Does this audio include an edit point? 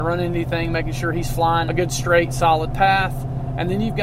yes; 1 cut; at 1.7 s

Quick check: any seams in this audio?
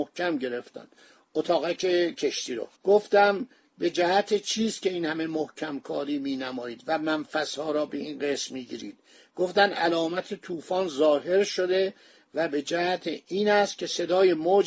yes; 1 cut; at 2.7 s

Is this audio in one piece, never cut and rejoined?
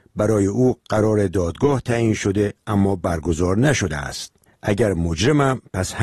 no; 1 cut; at 4.5 s

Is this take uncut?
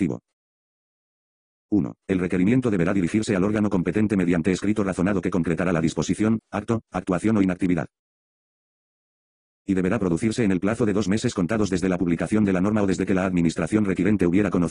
no; 1 cut; at 1.6 s

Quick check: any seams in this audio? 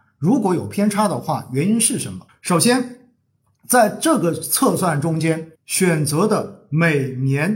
yes; 2 cuts; at 2.3 s, 5.5 s

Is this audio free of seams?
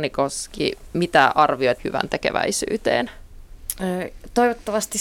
no; 1 cut; at 1.8 s

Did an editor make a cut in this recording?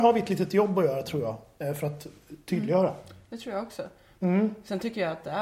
yes; 1 cut; at 4.2 s

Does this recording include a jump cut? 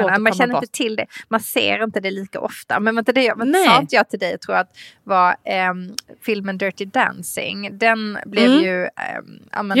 no; 0 cuts

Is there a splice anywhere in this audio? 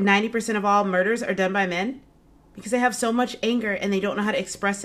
no; 0 cuts

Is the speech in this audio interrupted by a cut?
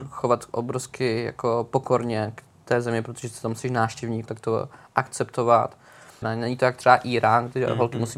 yes; 2 cuts; at 4.3 s, 6.2 s

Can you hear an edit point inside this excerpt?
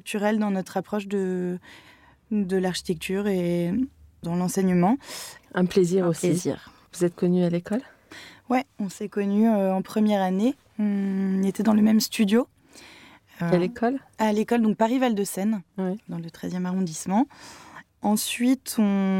yes; 2 cuts; at 5.4 s, 6.9 s

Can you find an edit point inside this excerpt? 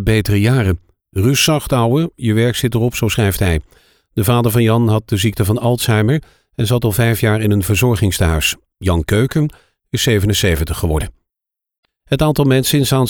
no; 0 cuts

